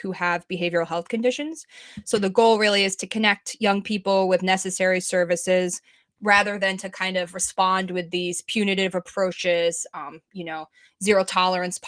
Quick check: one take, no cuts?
yes; 0 cuts

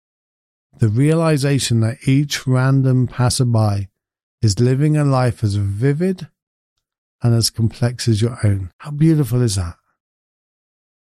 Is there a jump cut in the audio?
yes; 1 cut; at 8.7 s

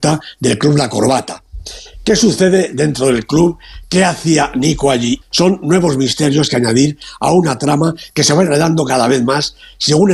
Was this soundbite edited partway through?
yes; 1 cut; at 5.2 s

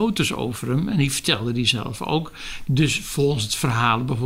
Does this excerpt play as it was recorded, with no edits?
no; 1 cut; at 2.6 s

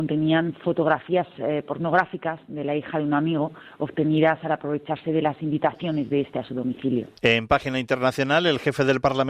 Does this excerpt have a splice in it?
no; 0 cuts

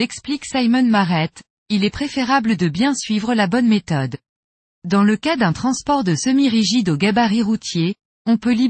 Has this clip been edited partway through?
yes; 1 cut; at 4.6 s

